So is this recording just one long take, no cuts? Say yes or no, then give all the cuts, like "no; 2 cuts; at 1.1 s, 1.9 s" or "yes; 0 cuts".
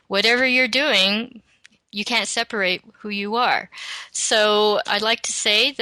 yes; 0 cuts